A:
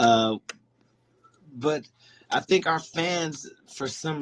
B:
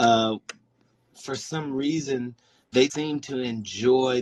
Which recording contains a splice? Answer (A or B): B